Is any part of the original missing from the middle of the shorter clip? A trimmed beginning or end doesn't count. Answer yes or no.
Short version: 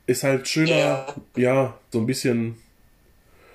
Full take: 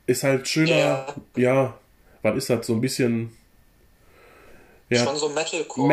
yes